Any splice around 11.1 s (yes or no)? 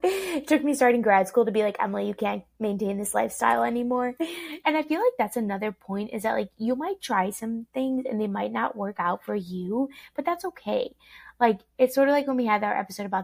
no